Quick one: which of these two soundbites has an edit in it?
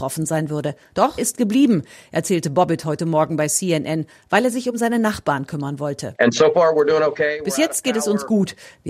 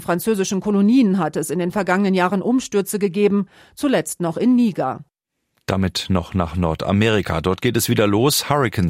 first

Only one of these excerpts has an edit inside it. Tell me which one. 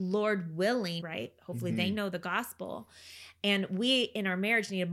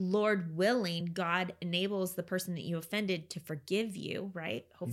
first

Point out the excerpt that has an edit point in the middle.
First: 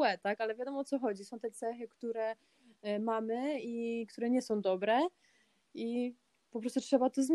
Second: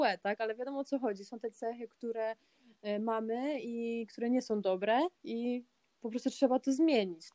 second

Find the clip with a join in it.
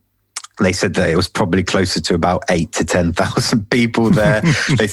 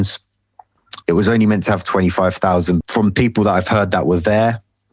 second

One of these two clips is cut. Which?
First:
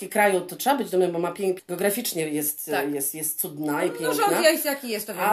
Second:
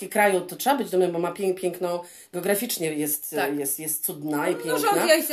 first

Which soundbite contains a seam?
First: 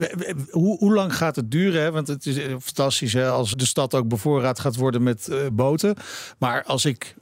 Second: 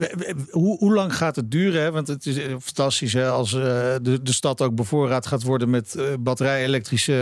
first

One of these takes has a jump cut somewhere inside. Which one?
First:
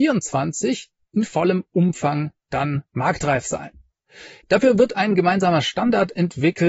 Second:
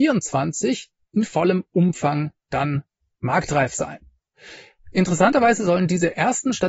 first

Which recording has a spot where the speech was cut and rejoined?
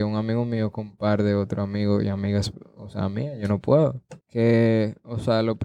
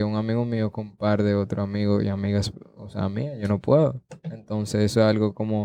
first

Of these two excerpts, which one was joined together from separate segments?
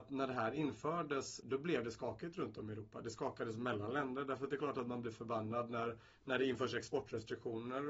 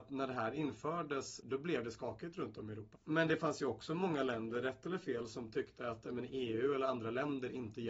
second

